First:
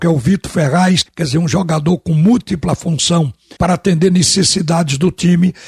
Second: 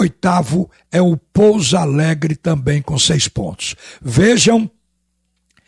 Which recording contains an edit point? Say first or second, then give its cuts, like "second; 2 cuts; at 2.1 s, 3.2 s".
first; 2 cuts; at 1.1 s, 3.6 s